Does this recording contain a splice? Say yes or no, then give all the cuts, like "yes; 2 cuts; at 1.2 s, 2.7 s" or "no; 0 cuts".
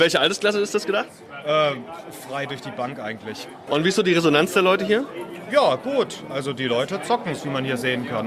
yes; 1 cut; at 3.7 s